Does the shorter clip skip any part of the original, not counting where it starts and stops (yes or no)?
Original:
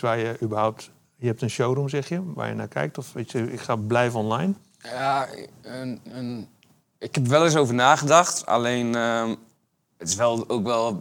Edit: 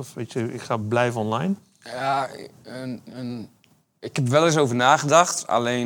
no